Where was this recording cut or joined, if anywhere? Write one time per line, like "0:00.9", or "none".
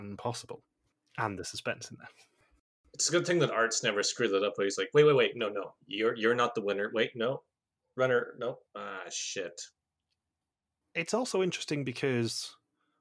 none

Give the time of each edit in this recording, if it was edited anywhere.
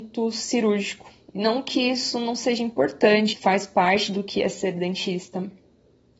0:01.3
0:03.3

